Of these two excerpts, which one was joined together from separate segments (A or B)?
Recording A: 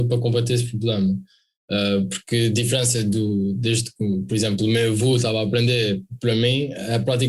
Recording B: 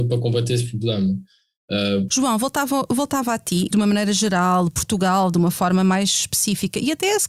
B